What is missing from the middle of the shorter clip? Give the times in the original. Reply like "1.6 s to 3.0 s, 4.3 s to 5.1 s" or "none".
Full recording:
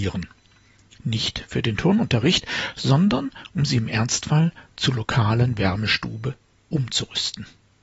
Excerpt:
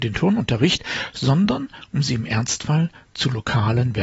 none